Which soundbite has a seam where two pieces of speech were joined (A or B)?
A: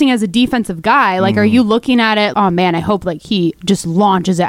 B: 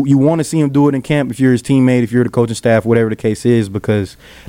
A